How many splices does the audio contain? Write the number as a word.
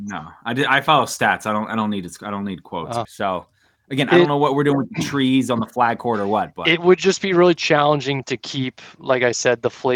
one